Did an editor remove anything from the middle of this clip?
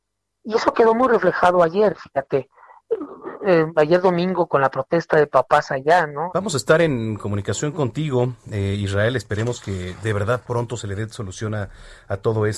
yes; 1 cut; at 6.3 s

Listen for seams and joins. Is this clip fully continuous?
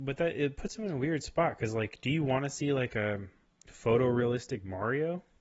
yes; 0 cuts

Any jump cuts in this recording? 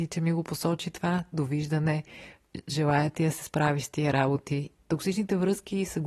yes; 1 cut; at 4.8 s

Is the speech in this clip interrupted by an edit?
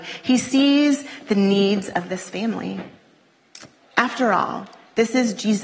no; 0 cuts

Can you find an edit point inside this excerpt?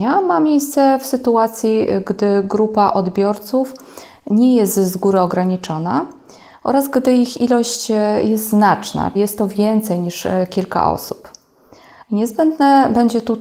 yes; 2 cuts; at 9.2 s, 12.0 s

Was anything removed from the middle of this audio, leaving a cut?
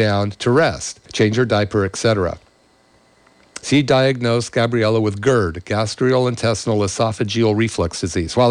yes; 2 cuts; at 1.0 s, 3.6 s

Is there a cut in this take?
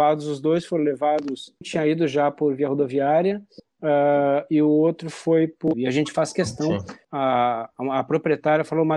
yes; 3 cuts; at 1.6 s, 5.7 s, 7.0 s

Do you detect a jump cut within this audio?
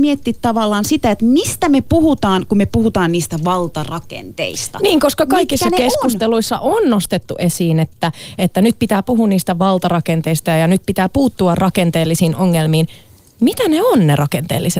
no; 0 cuts

